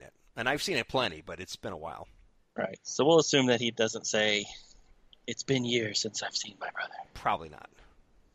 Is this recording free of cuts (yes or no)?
yes